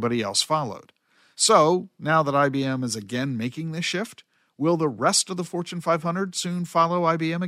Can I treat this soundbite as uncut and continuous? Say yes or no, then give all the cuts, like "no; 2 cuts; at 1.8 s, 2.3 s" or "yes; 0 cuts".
yes; 0 cuts